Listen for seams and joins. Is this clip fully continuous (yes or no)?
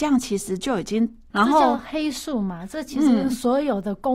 no